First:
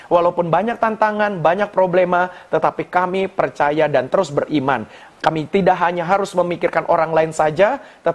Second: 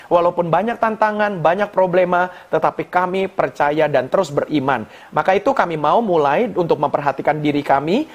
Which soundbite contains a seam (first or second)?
first